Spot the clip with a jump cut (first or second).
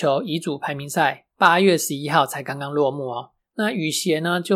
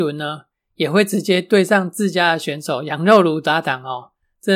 first